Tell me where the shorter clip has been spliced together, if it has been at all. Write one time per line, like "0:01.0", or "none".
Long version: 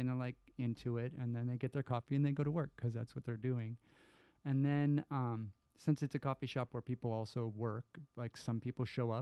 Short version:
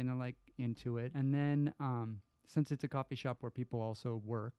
0:01.1